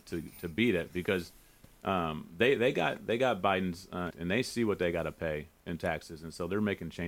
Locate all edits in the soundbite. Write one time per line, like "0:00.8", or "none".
0:04.1